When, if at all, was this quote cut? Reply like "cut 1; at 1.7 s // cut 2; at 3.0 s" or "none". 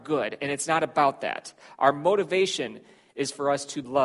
none